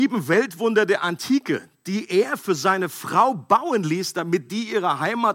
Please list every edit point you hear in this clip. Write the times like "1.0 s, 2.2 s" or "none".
none